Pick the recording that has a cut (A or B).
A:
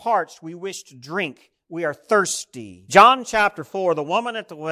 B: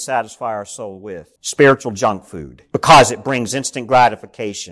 B